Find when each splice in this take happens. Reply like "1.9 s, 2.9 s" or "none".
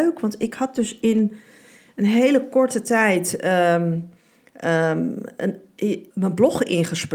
6.1 s

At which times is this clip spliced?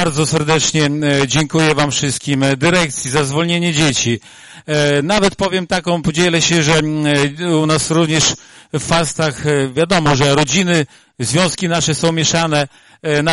none

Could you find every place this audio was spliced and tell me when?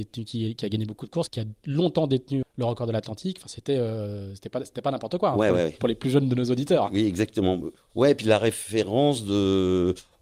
2.4 s

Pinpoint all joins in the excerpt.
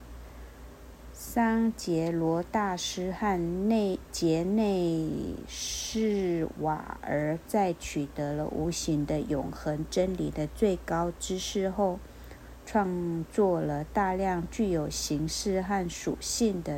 none

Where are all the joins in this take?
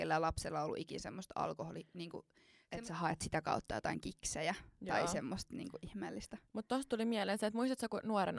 none

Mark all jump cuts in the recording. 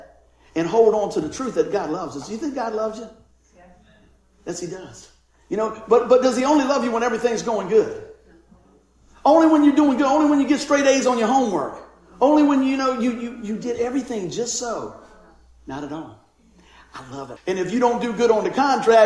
17.4 s

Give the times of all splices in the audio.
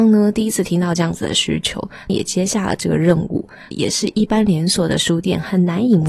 2.1 s, 3.7 s

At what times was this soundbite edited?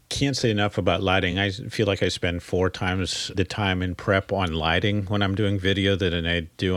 none

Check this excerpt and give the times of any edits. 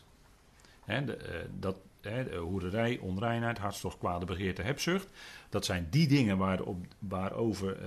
none

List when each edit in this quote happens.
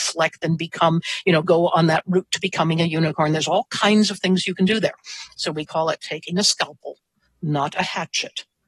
none

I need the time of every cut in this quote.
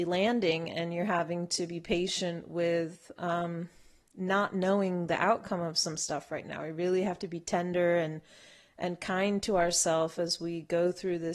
none

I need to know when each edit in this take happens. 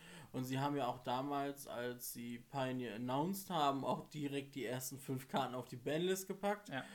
none

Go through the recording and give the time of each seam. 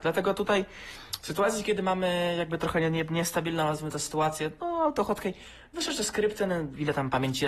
none

